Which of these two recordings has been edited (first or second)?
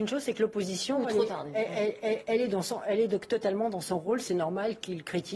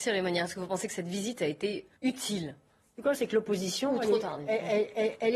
second